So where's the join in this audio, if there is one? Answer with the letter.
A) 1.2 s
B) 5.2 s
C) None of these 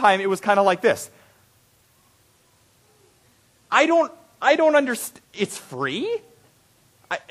B